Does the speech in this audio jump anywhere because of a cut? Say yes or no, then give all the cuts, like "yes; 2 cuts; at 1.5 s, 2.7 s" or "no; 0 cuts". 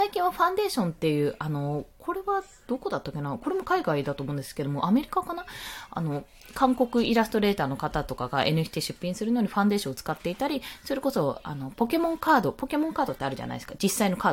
no; 0 cuts